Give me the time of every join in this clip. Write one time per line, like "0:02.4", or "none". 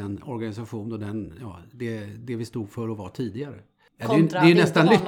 0:03.9